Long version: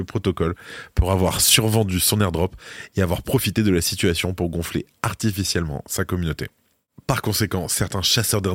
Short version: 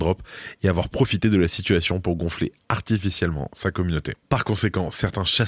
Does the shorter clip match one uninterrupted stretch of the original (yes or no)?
no